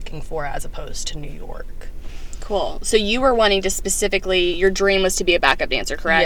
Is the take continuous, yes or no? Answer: yes